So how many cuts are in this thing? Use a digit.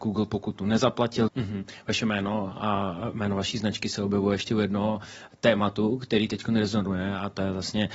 1